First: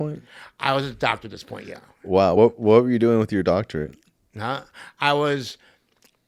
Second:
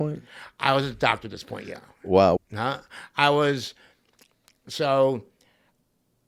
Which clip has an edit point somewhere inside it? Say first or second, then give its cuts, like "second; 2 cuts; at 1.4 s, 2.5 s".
second; 1 cut; at 2.4 s